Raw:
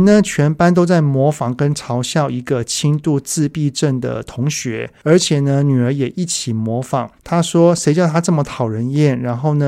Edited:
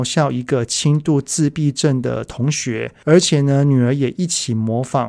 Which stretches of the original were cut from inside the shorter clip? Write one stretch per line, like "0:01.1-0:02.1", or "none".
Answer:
none